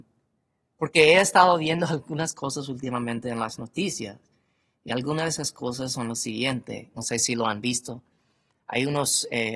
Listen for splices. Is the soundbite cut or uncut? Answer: uncut